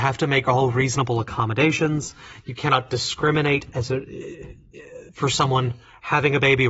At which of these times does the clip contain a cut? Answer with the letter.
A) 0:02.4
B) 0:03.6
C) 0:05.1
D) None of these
C